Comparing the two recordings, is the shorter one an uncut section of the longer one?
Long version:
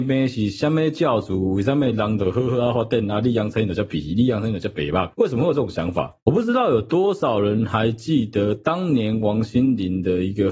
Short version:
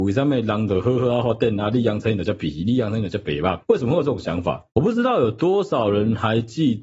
yes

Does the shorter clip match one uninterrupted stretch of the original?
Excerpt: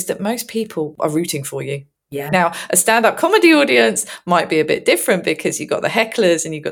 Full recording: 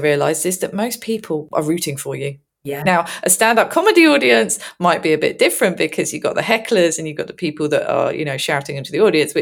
yes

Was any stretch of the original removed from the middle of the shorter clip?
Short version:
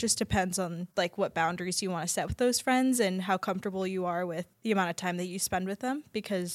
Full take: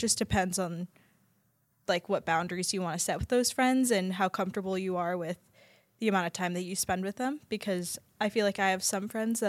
yes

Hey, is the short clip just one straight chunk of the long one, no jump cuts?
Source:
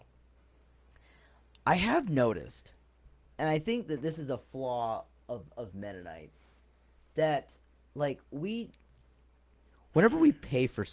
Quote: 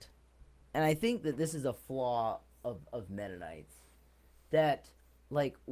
yes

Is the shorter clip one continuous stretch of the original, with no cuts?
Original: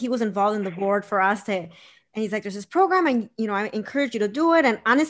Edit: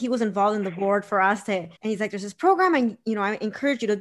no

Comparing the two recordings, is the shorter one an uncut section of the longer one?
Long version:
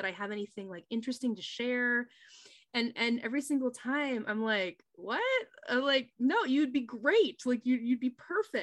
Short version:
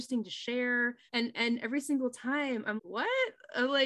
no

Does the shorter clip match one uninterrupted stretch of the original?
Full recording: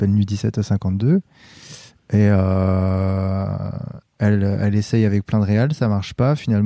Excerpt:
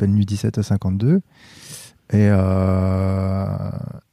yes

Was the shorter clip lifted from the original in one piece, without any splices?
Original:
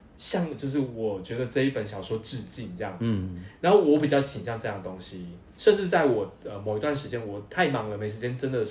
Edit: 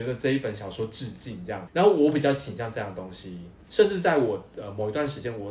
no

